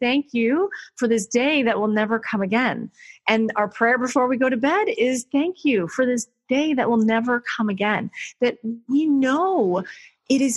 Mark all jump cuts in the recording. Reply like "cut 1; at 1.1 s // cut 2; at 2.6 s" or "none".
none